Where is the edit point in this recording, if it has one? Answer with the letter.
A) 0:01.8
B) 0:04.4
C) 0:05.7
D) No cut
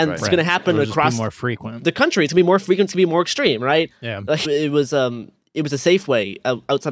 B